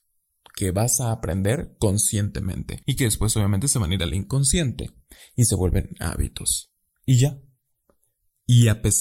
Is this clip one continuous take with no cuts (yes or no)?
no